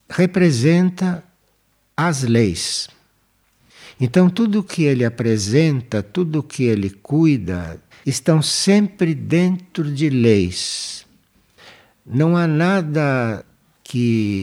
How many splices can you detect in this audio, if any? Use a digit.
1